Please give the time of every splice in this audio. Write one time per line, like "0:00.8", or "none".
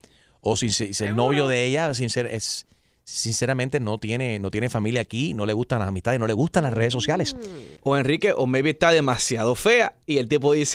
0:07.8